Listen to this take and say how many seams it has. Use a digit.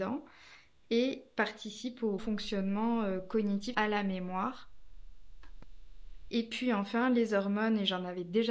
3